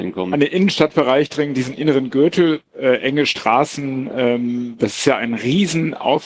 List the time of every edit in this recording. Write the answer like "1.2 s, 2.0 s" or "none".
none